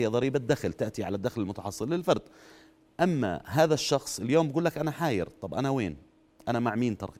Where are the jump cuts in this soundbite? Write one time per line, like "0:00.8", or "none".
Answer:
none